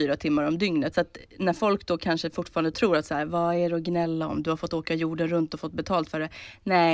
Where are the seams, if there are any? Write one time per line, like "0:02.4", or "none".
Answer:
0:00.9